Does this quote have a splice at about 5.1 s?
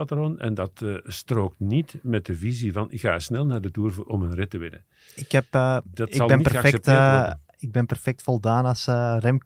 no; 0 cuts

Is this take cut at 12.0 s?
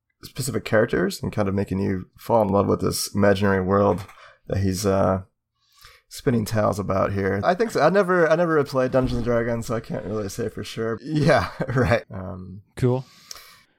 yes; 3 cuts; at 7.4 s, 11.0 s, 12.0 s

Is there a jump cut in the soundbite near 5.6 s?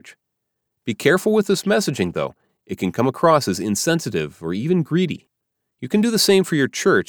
yes; 1 cut; at 5.6 s

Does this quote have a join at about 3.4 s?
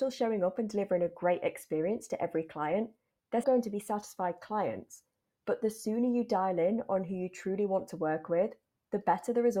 yes; 1 cut; at 3.4 s

